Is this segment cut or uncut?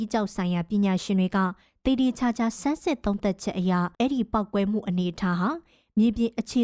cut